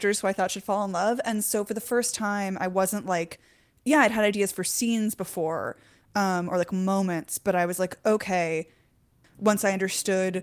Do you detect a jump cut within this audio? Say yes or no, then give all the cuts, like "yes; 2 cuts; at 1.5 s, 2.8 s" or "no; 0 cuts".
yes; 1 cut; at 9.2 s